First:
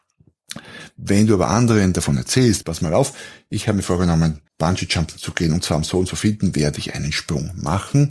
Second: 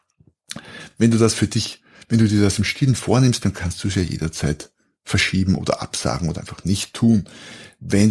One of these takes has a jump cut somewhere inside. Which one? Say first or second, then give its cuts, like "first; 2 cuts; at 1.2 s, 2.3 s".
first; 3 cuts; at 0.9 s, 2.6 s, 4.5 s